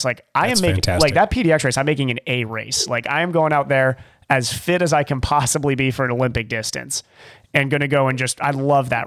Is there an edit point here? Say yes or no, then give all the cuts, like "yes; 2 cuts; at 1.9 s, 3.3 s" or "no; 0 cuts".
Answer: no; 0 cuts